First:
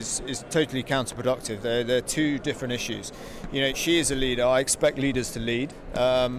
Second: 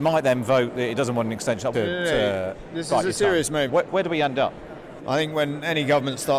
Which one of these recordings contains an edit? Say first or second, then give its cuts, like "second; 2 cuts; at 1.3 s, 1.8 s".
second; 3 cuts; at 1.7 s, 3.7 s, 5.0 s